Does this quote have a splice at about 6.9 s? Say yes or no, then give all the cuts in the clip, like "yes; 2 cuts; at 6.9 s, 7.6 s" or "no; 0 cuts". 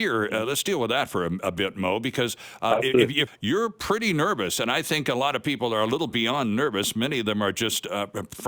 no; 1 cut; at 3.3 s